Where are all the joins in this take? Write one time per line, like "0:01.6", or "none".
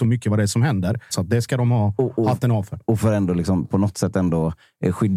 0:01.1